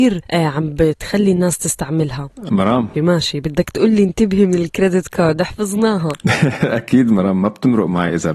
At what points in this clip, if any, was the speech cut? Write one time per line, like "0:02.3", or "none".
0:02.9